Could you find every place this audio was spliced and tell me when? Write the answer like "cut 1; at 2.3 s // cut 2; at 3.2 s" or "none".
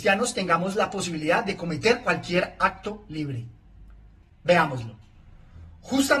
cut 1; at 4.2 s